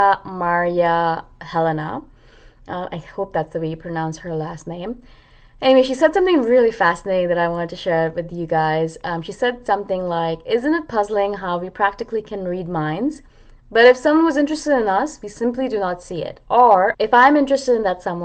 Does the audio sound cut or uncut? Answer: cut